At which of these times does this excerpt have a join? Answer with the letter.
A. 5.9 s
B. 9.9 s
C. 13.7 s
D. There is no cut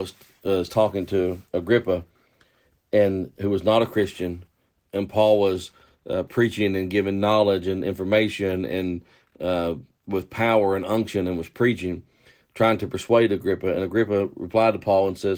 D